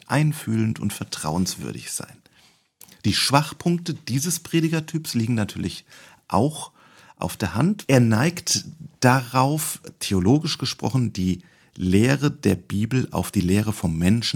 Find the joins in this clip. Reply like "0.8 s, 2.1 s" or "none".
7.8 s